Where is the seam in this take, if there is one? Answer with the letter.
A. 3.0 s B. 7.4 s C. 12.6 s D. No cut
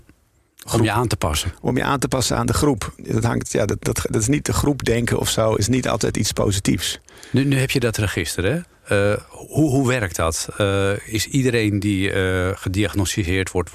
A